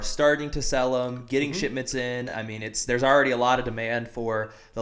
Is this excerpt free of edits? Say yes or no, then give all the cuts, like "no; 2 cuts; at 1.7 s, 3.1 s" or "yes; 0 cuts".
yes; 0 cuts